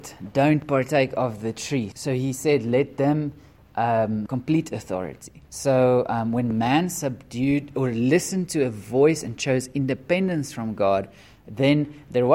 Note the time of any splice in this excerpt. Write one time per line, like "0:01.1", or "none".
0:01.9
0:04.3
0:05.4